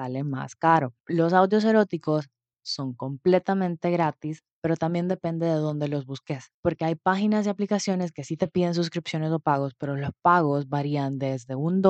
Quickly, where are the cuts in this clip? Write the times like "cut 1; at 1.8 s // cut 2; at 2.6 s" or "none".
cut 1; at 6.5 s

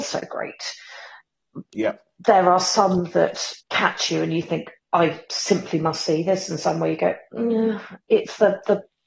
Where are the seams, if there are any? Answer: cut 1; at 3.6 s

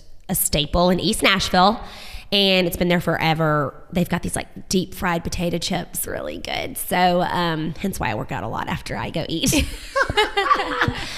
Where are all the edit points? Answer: cut 1; at 6.1 s

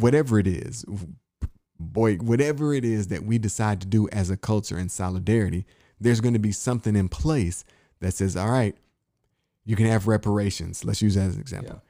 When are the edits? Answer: cut 1; at 1.8 s

